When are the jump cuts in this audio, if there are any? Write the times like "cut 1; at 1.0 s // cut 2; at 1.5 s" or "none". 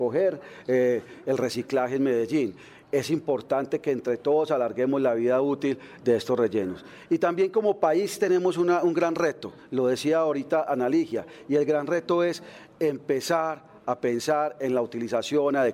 none